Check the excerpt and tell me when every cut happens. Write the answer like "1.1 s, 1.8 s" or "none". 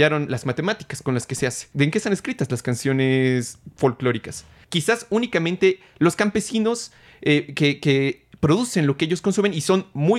1.7 s, 4.6 s